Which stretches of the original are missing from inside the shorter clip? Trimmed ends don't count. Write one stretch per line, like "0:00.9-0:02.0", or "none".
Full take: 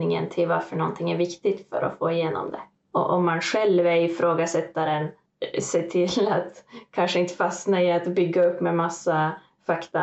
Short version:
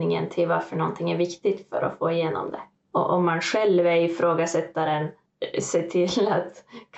none

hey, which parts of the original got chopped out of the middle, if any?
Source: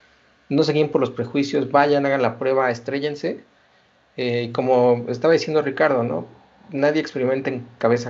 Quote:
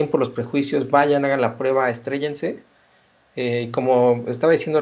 none

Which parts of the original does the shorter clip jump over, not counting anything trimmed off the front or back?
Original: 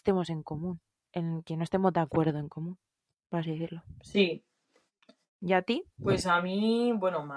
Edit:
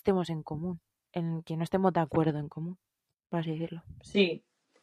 none

